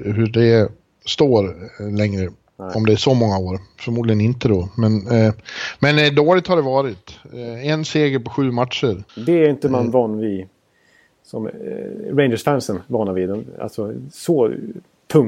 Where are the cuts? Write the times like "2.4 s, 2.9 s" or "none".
9.1 s